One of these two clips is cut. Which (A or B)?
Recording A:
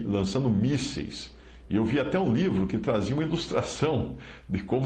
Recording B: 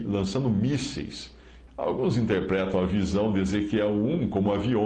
B